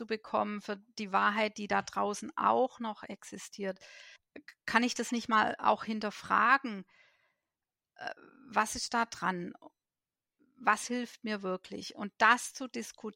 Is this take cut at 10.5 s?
no; 1 cut; at 4.2 s

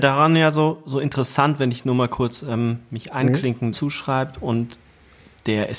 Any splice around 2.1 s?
no; 1 cut; at 3.7 s

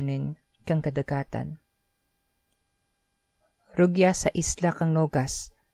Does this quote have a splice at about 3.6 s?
no; 0 cuts

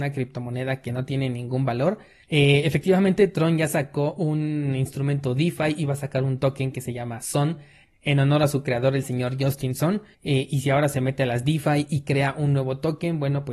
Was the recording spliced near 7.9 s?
no; 2 cuts; at 2.2 s, 10.1 s

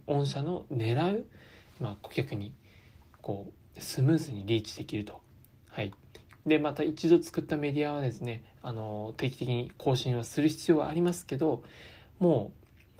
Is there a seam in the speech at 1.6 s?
no; 1 cut; at 6.4 s

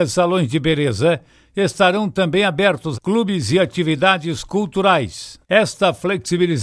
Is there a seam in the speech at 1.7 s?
no; 2 cuts; at 2.9 s, 5.4 s

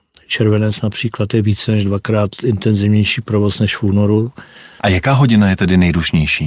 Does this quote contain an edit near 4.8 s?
yes; 1 cut; at 4.8 s

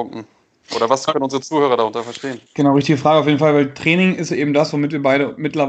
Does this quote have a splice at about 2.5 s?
yes; 1 cut; at 2.5 s

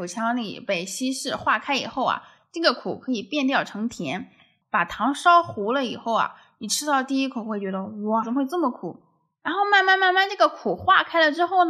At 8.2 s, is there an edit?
yes; 2 cuts; at 4.6 s, 8.2 s

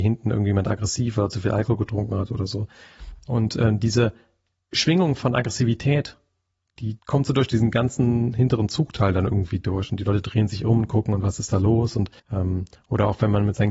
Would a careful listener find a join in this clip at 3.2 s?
no; 2 cuts; at 7.0 s, 12.2 s

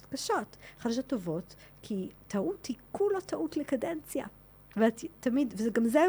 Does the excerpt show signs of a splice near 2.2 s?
yes; 1 cut; at 2.2 s

